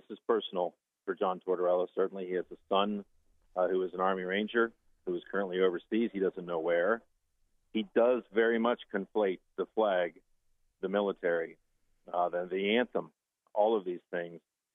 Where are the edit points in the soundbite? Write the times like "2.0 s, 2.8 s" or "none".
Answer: none